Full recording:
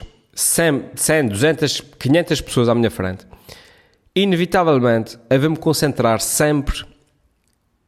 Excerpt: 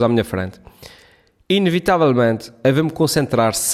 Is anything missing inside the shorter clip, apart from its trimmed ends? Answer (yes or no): no